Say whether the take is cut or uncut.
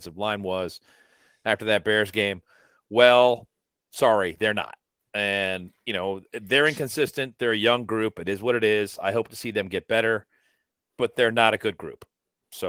uncut